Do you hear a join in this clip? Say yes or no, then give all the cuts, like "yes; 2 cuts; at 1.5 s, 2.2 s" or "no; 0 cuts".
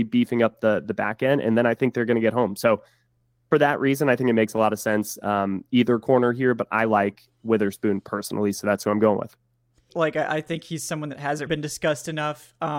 yes; 2 cuts; at 9.9 s, 11.5 s